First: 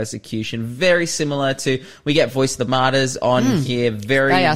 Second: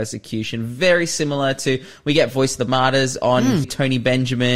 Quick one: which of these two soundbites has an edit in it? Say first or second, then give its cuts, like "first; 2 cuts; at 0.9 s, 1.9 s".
second; 1 cut; at 3.6 s